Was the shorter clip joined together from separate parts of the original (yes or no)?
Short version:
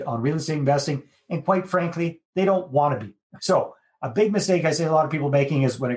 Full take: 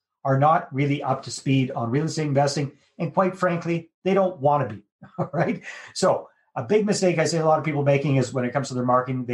yes